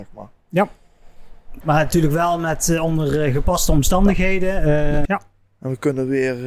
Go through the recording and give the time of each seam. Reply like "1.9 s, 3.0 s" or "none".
1.6 s, 5.0 s